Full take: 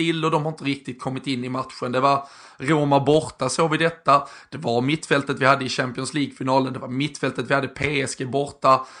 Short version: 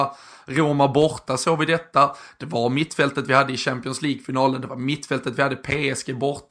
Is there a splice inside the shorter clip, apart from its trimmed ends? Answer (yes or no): no